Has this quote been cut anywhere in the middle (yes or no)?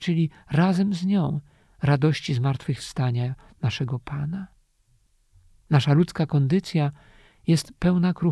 no